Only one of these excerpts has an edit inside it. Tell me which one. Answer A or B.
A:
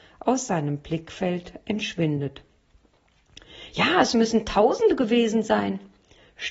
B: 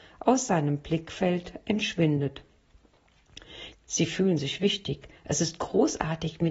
B